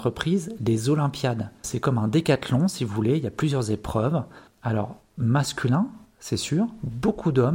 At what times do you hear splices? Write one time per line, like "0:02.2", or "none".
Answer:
0:01.6
0:04.5